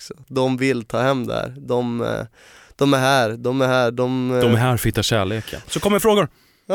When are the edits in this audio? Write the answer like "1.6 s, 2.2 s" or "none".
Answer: 5.6 s